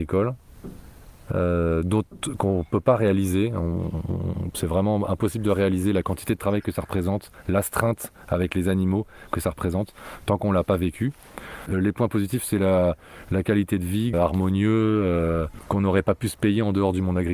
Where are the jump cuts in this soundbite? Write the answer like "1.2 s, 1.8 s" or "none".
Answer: 14.1 s